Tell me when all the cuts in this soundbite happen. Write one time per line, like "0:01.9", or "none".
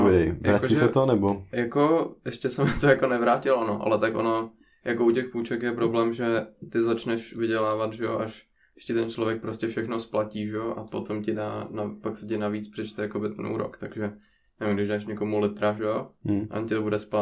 none